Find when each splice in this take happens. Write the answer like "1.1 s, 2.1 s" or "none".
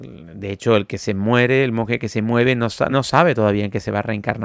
2.9 s